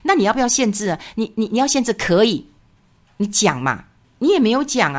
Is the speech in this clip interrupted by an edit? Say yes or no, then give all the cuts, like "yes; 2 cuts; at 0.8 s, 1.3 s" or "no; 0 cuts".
yes; 1 cut; at 4.0 s